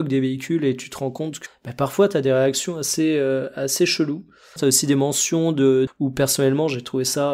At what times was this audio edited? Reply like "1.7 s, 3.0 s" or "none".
1.5 s, 4.6 s, 5.9 s